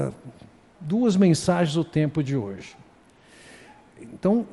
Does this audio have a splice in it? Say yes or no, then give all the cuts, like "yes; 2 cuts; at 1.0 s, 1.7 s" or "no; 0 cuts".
no; 0 cuts